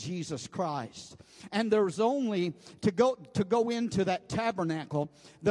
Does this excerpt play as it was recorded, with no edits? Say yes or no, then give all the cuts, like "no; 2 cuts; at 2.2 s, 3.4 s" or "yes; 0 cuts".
yes; 0 cuts